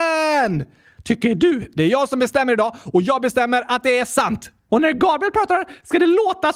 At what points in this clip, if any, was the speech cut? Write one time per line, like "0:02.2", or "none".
0:04.7

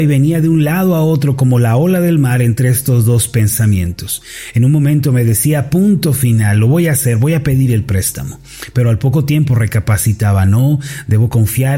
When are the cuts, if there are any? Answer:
none

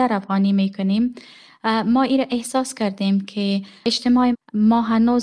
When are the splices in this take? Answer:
0:04.3

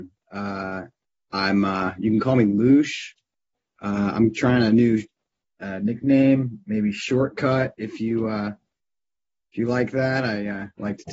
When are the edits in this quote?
none

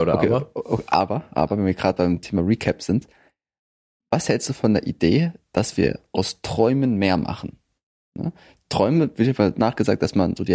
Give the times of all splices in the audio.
none

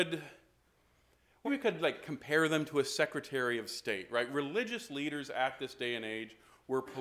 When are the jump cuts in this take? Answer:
0:01.4

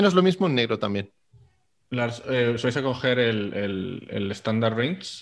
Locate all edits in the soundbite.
none

